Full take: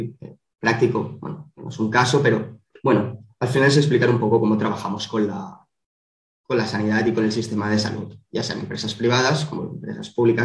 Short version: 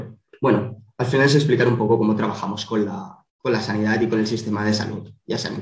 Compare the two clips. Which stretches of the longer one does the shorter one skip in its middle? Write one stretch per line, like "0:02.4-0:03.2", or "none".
0:05.7-0:06.3